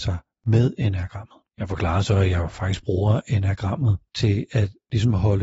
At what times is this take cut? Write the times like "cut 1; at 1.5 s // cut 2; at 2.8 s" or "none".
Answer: cut 1; at 1.5 s